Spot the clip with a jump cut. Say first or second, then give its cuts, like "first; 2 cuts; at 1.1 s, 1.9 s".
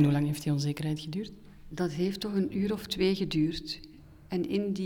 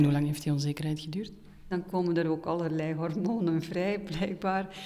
second; 1 cut; at 1.7 s